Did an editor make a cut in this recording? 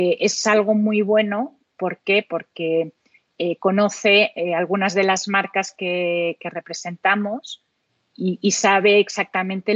no; 0 cuts

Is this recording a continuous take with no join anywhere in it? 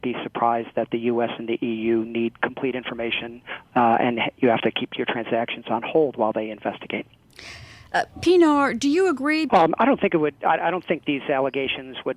no; 1 cut; at 9.5 s

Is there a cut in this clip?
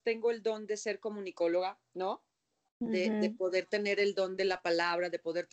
no; 0 cuts

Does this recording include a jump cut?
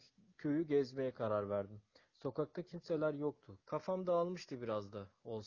yes; 1 cut; at 3.6 s

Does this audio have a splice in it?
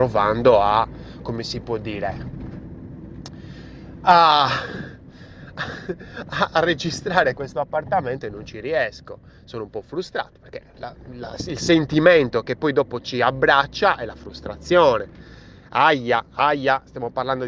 no; 0 cuts

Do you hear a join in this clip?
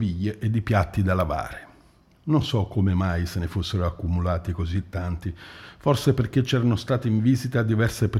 no; 0 cuts

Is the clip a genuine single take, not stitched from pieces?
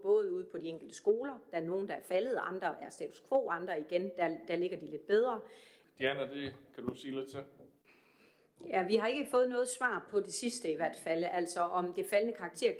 no; 1 cut; at 5.8 s

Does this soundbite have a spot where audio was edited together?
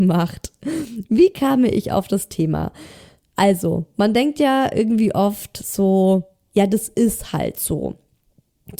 yes; 1 cut; at 6.5 s

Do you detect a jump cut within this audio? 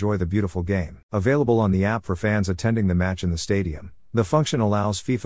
yes; 1 cut; at 1.0 s

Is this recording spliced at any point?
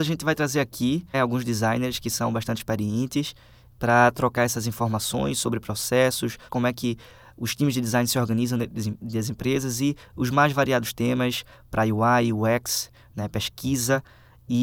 yes; 2 cuts; at 1.1 s, 6.5 s

